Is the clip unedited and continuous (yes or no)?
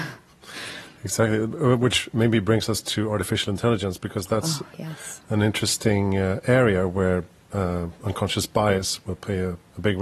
yes